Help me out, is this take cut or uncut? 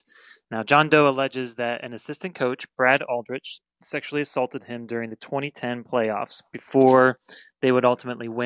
uncut